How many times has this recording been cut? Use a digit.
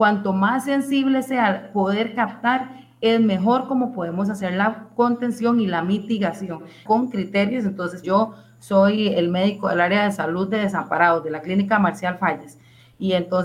2